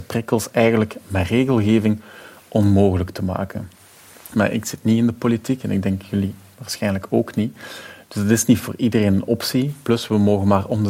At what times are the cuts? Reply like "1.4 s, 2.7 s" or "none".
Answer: 4.3 s